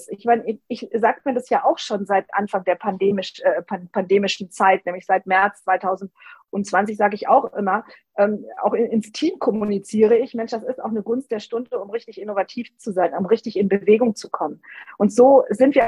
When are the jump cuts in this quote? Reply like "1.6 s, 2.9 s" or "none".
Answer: none